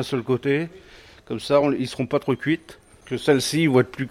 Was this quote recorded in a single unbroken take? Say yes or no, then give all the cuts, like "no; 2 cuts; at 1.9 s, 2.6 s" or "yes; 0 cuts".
yes; 0 cuts